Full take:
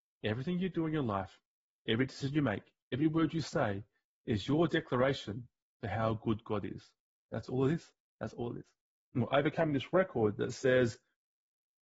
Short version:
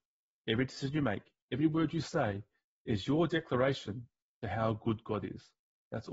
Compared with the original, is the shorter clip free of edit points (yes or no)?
yes